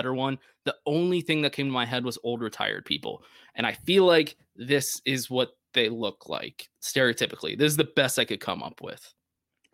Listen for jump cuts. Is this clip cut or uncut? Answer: uncut